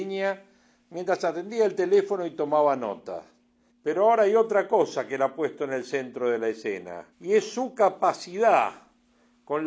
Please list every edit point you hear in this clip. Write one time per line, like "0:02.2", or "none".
0:03.7
0:07.1